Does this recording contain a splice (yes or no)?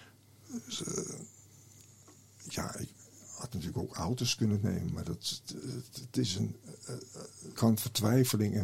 yes